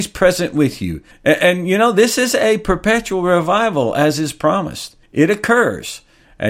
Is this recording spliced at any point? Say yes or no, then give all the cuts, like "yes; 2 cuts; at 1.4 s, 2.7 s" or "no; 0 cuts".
yes; 2 cuts; at 1.1 s, 5.0 s